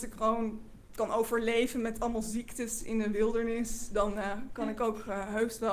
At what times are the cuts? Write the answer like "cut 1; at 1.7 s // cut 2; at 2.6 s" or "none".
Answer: none